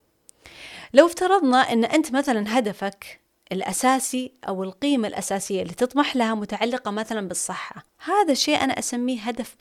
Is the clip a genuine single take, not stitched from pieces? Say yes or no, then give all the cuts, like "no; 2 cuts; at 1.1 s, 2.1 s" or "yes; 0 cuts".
no; 1 cut; at 7.9 s